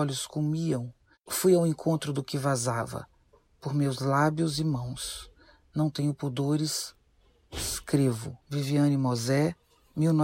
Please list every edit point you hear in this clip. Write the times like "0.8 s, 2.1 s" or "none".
8.4 s